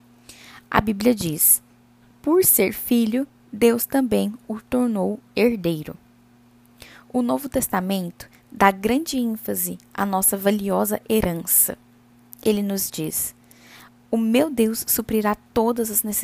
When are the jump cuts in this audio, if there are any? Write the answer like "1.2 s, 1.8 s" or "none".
none